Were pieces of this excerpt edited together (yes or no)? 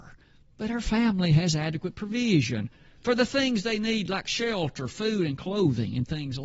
no